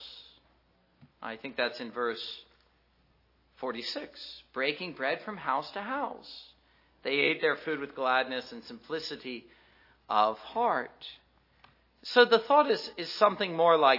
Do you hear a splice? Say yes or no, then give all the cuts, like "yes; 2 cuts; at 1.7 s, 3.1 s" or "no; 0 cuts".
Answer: no; 0 cuts